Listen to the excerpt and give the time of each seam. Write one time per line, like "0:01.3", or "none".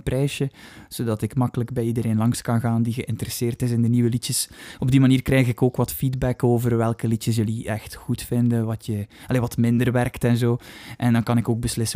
none